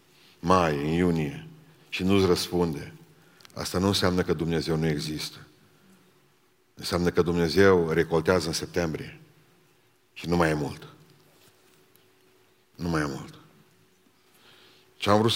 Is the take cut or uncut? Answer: uncut